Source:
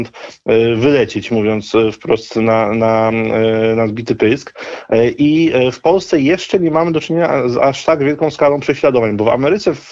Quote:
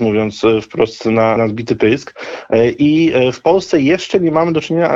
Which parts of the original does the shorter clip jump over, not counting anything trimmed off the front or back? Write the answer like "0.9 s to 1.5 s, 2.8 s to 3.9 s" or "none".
2.7 s to 3.8 s